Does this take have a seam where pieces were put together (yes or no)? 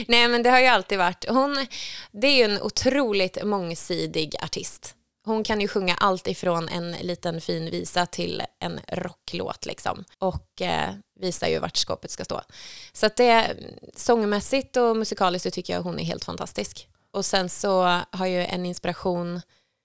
yes